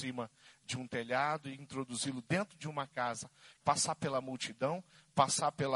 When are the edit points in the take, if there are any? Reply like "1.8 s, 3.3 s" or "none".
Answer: 3.6 s